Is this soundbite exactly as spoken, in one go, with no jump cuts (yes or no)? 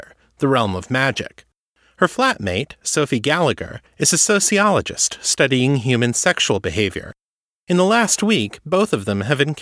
yes